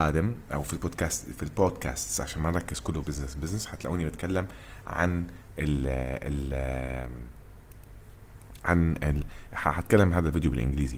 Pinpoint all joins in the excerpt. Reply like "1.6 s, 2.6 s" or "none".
3.0 s